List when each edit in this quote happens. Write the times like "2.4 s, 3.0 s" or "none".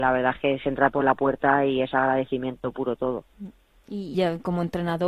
4.1 s

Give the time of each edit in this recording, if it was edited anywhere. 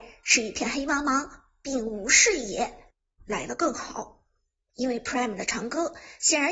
3.2 s, 4.7 s

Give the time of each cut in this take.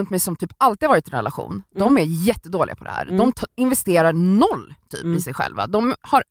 3.5 s

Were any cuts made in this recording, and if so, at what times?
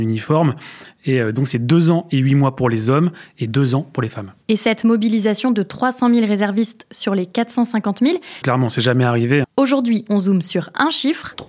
8.4 s, 9.4 s

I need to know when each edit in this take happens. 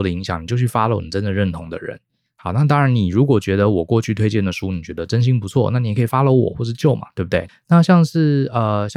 7.5 s

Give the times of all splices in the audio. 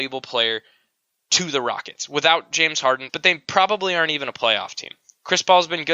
3.1 s

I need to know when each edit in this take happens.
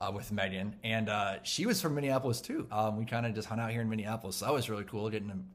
2.7 s

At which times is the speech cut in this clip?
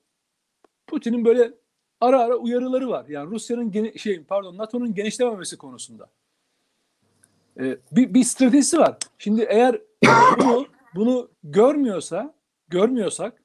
none

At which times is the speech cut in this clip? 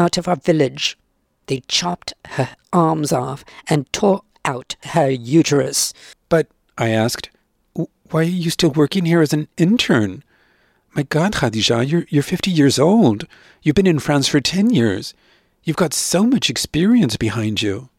6.1 s

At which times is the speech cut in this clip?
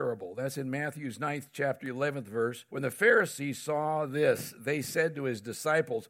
2.7 s

